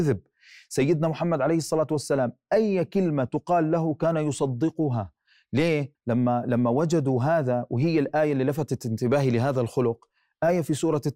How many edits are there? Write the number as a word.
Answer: one